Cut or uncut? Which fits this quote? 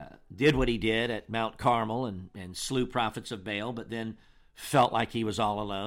uncut